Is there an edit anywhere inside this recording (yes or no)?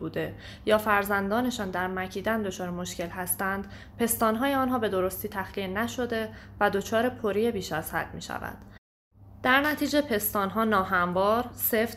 no